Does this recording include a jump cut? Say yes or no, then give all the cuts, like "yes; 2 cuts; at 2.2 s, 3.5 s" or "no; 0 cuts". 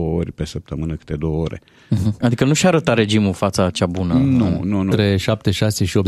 yes; 2 cuts; at 2.2 s, 4.9 s